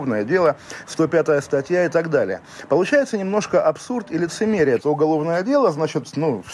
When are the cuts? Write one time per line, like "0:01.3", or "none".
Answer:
0:04.8